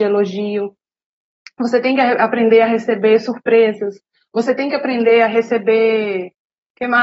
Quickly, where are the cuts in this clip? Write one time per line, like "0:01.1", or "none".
none